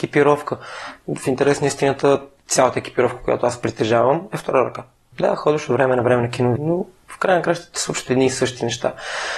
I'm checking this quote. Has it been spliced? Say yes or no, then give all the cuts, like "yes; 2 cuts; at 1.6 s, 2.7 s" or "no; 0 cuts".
yes; 2 cuts; at 5.1 s, 6.6 s